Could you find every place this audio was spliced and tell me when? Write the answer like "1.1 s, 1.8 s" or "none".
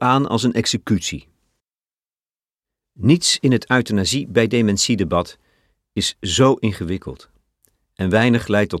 none